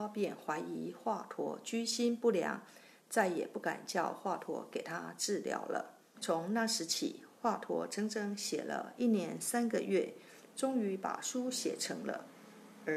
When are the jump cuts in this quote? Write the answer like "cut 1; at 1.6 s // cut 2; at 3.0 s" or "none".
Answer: cut 1; at 6.1 s